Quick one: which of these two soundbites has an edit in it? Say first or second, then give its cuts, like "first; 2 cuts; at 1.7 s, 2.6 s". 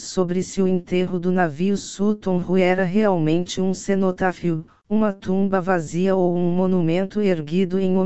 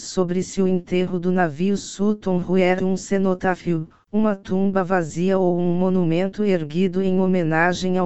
second; 1 cut; at 2.8 s